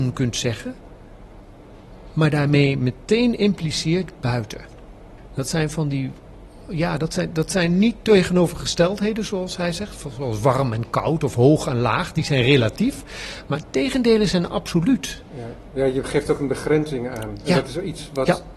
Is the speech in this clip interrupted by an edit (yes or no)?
no